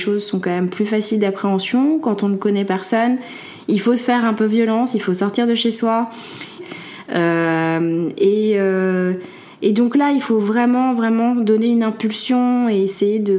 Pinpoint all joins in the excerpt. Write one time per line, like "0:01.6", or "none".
0:06.6